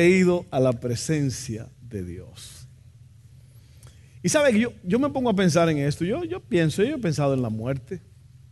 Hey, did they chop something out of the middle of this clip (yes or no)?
no